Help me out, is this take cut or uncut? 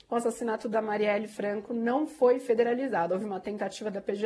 cut